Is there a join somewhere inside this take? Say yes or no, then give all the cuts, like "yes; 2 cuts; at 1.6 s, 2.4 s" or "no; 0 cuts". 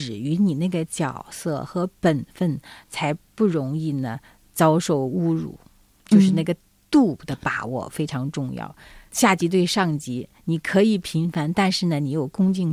no; 0 cuts